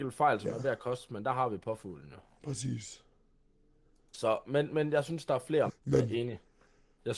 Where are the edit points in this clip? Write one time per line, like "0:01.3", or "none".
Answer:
0:05.7